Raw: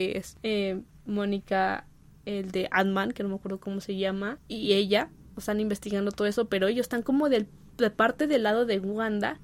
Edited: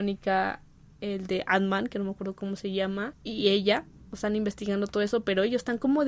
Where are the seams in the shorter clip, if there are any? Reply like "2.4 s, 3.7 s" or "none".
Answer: none